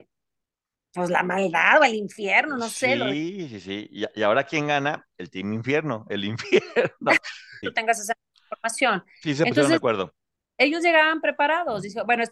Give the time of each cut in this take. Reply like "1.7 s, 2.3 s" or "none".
7.6 s